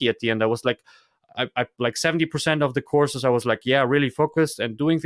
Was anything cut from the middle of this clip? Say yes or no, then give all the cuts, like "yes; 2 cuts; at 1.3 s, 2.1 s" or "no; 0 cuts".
no; 0 cuts